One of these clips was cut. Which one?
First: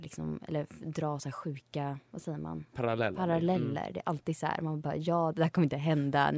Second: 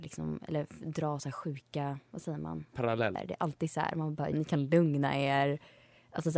second; 2 cuts; at 3.2 s, 4.3 s

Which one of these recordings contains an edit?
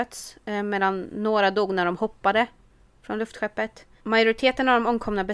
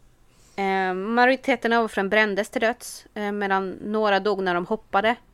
first; 1 cut; at 4.0 s

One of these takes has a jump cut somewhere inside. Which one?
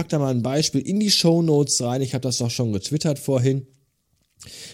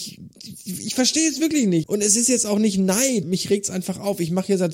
second; 2 cuts; at 1.8 s, 3.2 s

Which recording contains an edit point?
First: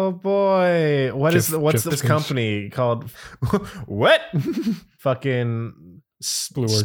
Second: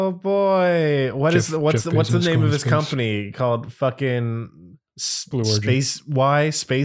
first; 3 cuts; at 1.9 s, 3.1 s, 5.0 s

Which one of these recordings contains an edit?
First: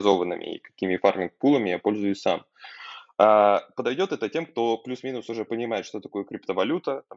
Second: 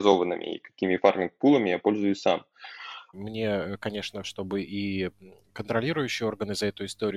second; 2 cuts; at 3.1 s, 4.2 s

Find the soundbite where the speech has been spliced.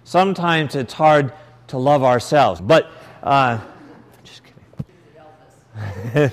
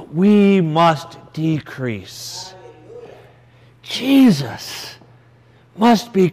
first; 2 cuts; at 2.6 s, 4.9 s

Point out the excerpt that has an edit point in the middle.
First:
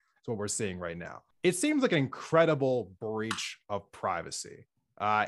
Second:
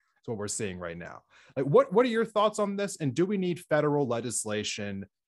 first; 1 cut; at 1.3 s

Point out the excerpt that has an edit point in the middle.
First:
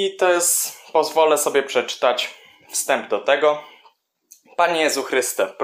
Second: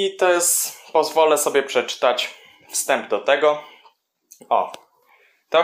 second; 1 cut; at 4.4 s

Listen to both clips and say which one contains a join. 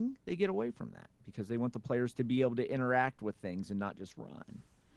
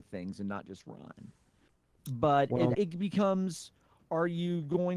second; 1 cut; at 2.7 s

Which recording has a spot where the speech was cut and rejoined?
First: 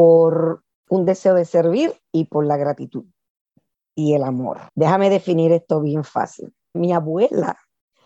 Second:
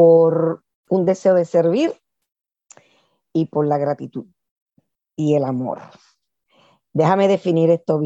first; 3 cuts; at 2.0 s, 4.7 s, 6.7 s

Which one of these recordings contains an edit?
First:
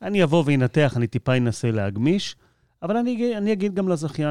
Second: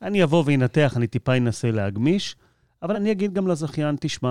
second; 1 cut; at 2.9 s

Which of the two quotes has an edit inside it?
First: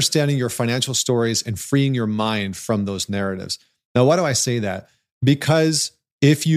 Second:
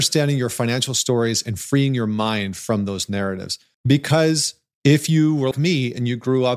second; 2 cuts; at 3.7 s, 5.5 s

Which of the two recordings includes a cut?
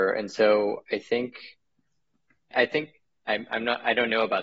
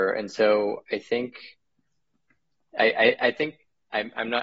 first; 1 cut; at 2.5 s

